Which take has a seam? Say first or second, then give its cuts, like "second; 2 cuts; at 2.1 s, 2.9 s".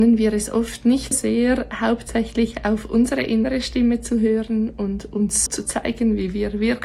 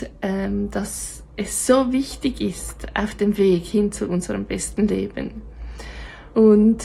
first; 2 cuts; at 1.1 s, 5.5 s